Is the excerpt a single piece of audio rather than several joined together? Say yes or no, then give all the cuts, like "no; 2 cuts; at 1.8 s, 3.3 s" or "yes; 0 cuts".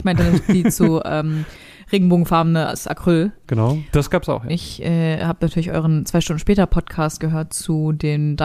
no; 2 cuts; at 3.4 s, 4.5 s